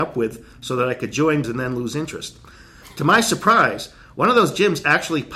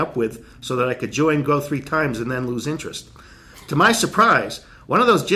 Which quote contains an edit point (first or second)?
first